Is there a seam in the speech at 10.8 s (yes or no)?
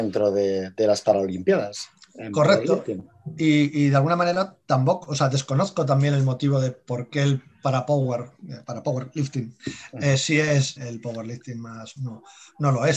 yes